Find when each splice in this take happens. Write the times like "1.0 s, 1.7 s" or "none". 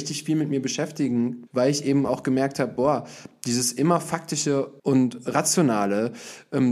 1.5 s, 4.8 s